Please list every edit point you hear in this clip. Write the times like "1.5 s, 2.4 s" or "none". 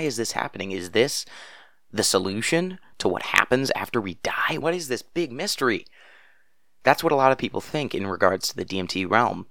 4.6 s